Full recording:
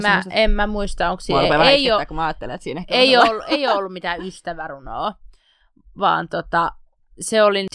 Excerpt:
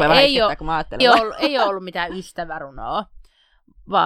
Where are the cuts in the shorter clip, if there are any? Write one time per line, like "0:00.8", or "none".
0:01.0